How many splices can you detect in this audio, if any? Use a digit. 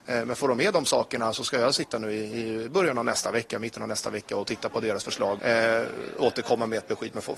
1